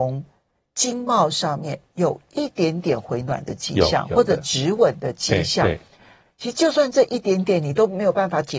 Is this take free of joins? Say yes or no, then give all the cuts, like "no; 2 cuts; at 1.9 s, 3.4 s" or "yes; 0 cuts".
yes; 0 cuts